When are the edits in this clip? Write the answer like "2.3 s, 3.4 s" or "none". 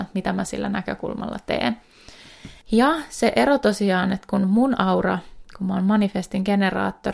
2.6 s